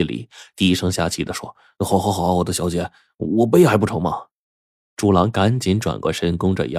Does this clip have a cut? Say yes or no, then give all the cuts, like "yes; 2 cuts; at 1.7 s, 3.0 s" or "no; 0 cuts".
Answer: no; 0 cuts